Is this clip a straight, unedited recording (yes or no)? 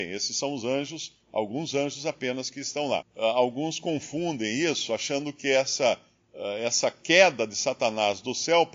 no